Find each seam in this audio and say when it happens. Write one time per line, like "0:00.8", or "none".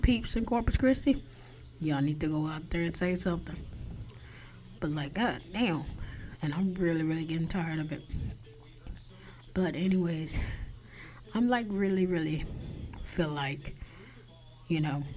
0:04.8
0:06.4